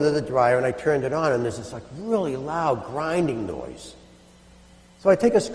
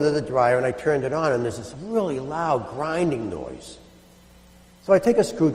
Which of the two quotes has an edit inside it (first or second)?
second